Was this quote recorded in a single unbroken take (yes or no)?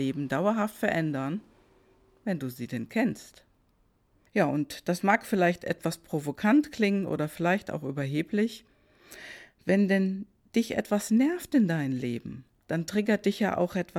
no